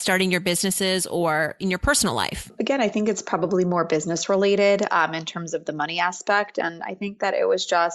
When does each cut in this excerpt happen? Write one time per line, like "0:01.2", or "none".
none